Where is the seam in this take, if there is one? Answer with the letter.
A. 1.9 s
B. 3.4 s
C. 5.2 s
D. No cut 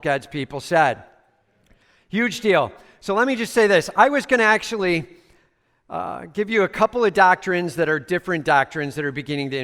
D